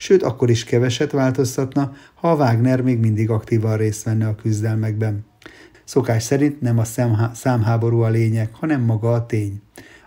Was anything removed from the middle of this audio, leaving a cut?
yes; 1 cut; at 5.7 s

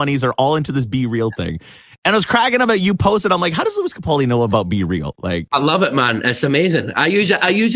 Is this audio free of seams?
yes; 0 cuts

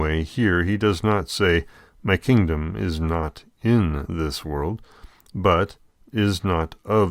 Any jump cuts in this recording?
no; 0 cuts

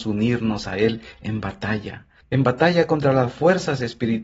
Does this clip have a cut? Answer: yes; 1 cut; at 2.2 s

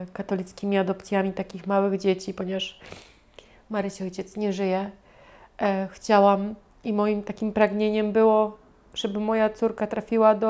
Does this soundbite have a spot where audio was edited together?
no; 0 cuts

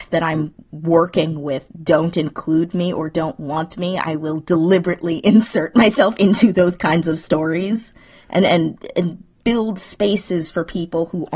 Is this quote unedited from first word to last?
yes; 0 cuts

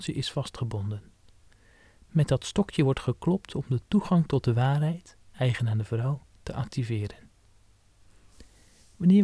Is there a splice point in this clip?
no; 0 cuts

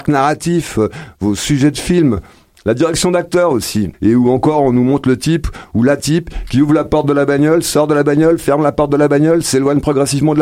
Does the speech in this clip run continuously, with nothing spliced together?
no; 1 cut; at 3.9 s

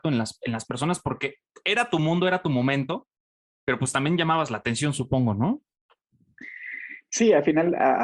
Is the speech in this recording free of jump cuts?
yes; 0 cuts

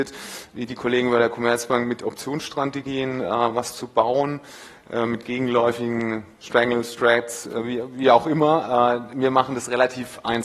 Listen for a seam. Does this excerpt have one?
no; 0 cuts

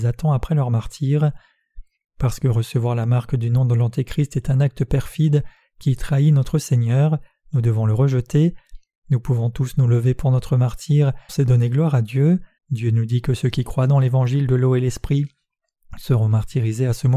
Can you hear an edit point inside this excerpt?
yes; 2 cuts; at 11.3 s, 12.6 s

